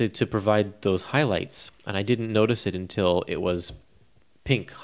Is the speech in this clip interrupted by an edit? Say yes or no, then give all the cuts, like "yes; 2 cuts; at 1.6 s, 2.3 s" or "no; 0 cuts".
no; 0 cuts